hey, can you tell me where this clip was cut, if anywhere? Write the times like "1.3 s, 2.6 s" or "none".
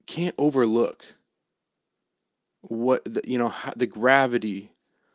none